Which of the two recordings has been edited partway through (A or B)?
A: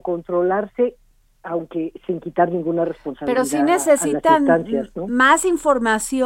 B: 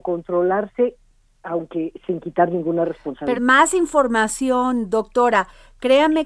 B